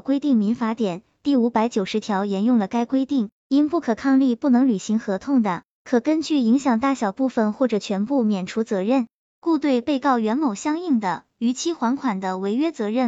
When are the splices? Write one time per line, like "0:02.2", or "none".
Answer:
none